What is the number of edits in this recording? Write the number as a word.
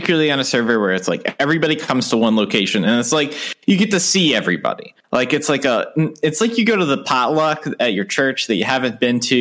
zero